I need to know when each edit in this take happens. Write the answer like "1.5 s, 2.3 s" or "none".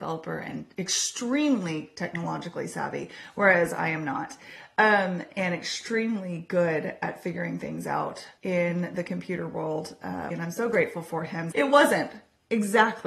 8.4 s, 10.3 s, 11.5 s